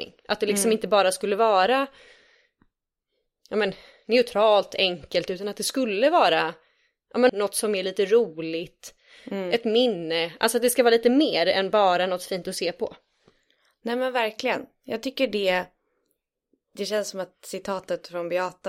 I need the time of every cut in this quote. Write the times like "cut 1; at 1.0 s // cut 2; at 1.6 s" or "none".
cut 1; at 7.3 s